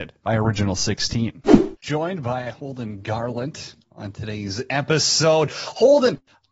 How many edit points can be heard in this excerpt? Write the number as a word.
zero